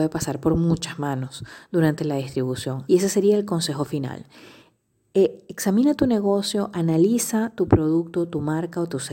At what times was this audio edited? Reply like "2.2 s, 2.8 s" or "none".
2.9 s